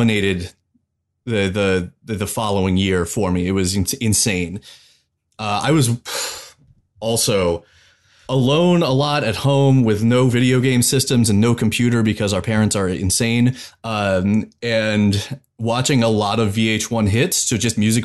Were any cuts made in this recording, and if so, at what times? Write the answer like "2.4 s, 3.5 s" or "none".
none